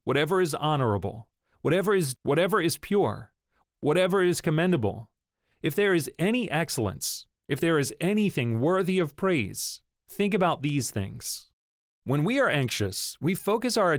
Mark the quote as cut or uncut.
cut